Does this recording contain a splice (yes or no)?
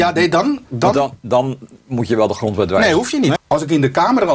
yes